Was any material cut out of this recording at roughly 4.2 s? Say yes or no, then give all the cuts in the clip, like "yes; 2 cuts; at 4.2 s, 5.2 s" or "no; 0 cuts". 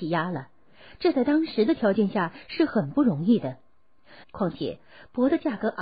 yes; 1 cut; at 4.2 s